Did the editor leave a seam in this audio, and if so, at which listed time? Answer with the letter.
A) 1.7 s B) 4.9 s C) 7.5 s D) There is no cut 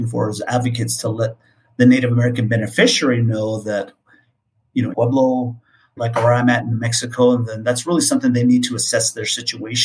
B